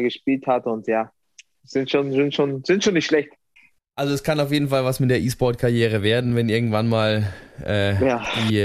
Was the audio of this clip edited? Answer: no; 0 cuts

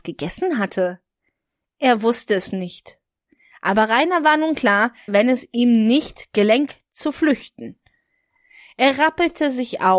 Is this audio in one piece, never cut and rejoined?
no; 1 cut; at 5.1 s

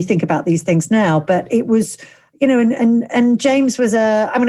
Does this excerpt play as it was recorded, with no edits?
yes; 0 cuts

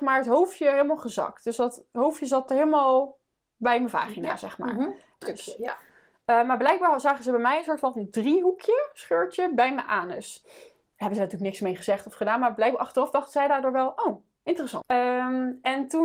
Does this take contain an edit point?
yes; 2 cuts; at 5.2 s, 14.8 s

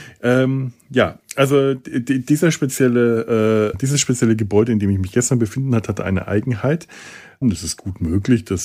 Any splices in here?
yes; 2 cuts; at 3.7 s, 7.4 s

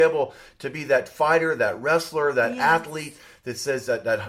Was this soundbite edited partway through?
no; 0 cuts

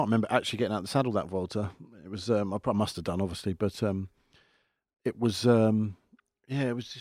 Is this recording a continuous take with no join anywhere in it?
yes; 0 cuts

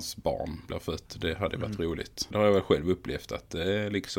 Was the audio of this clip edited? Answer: yes; 1 cut; at 2.3 s

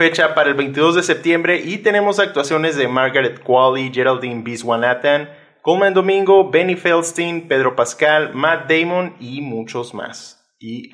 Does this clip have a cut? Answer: no; 0 cuts

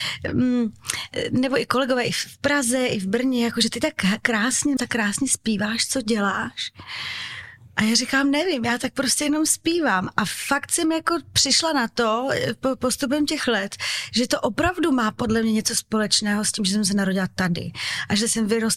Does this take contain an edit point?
yes; 1 cut; at 4.8 s

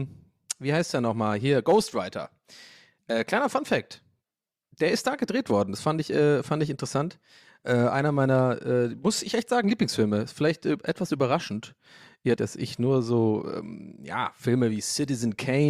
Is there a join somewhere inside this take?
yes; 1 cut; at 12.4 s

